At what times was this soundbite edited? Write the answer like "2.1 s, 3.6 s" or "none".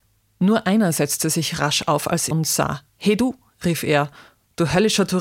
2.3 s